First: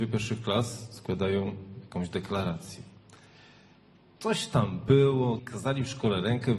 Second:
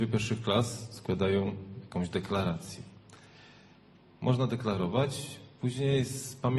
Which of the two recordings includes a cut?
first; 2 cuts; at 4.2 s, 5.4 s

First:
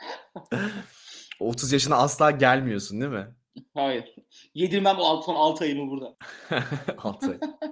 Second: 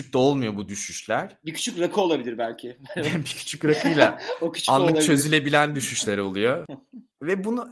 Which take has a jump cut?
second; 1 cut; at 6.7 s

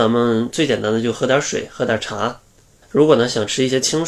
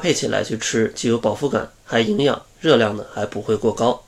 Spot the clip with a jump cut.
first; 1 cut; at 2.8 s

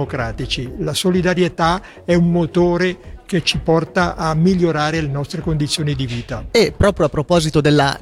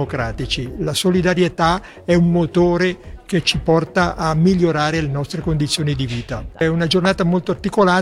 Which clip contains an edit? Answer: second; 1 cut; at 6.5 s

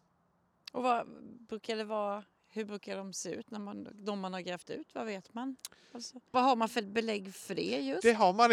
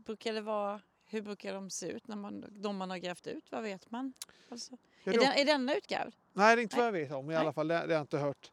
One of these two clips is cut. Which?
first; 1 cut; at 6.3 s

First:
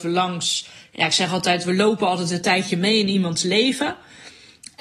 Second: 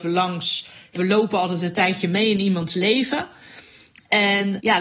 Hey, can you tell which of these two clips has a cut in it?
second; 1 cut; at 0.9 s

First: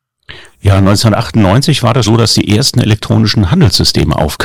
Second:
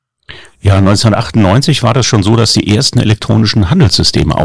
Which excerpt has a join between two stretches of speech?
first; 1 cut; at 2.0 s

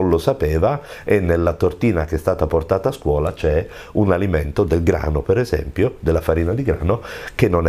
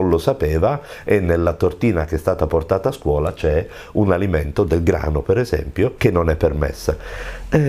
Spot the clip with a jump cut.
second; 1 cut; at 6.0 s

